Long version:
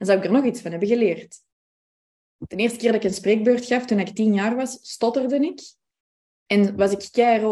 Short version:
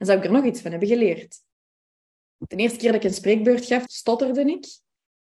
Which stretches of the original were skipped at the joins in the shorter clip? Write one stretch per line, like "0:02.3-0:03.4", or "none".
0:03.9-0:04.8